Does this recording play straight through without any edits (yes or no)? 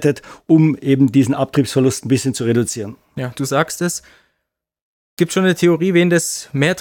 no